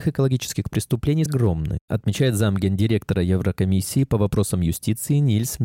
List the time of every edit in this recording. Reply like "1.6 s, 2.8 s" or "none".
1.3 s